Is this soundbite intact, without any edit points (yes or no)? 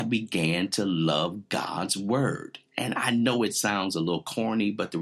yes